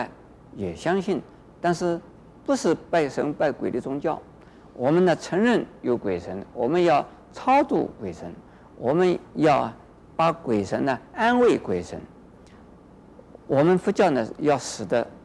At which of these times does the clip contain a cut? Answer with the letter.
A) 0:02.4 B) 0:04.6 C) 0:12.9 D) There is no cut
D